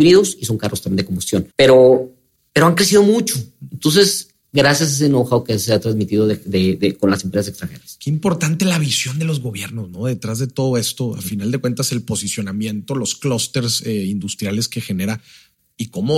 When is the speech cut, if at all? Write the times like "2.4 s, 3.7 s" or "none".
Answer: 1.5 s